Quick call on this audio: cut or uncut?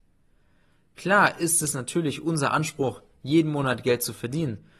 uncut